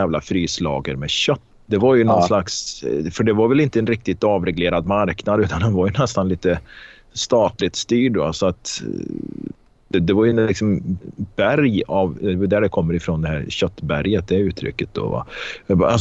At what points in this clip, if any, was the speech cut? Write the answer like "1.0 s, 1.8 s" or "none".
1.5 s